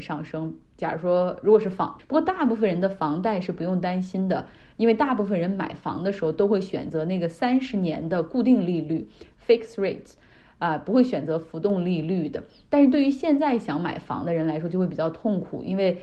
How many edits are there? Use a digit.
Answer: 1